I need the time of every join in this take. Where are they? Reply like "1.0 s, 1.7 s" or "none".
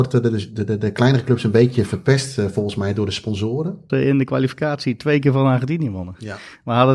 3.9 s

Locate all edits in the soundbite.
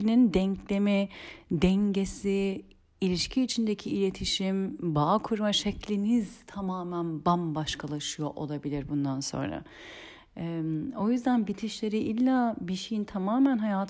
none

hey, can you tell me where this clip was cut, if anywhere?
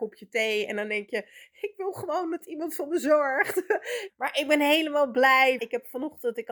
4.1 s, 5.6 s

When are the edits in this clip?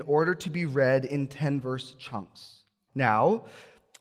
2.9 s

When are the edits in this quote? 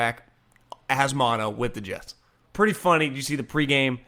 none

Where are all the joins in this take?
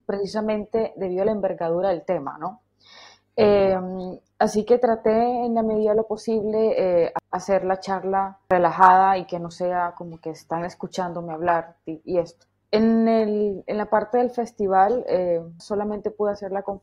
12.6 s, 15.6 s

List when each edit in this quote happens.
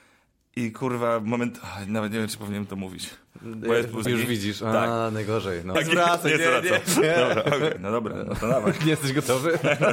4.1 s, 5.8 s, 7.8 s

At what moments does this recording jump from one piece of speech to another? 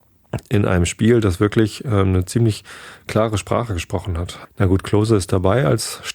4.4 s

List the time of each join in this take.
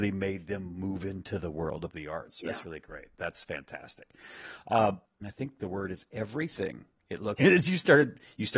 5.2 s, 7.4 s

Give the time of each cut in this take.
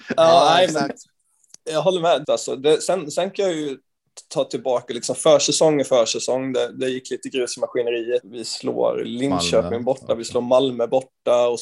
2.2 s, 8.2 s

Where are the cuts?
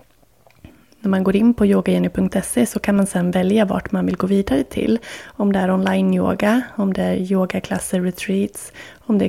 none

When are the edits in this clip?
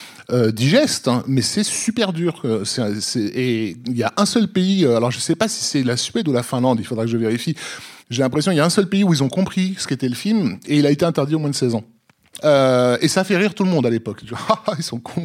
8.0 s, 12.4 s

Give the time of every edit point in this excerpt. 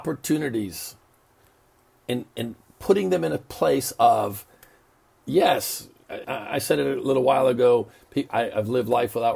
6.2 s, 8.3 s

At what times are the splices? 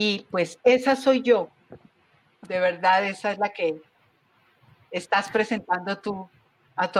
none

